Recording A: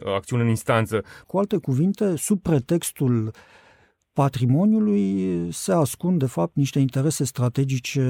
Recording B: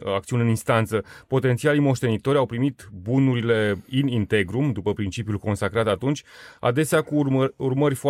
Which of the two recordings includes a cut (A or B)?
A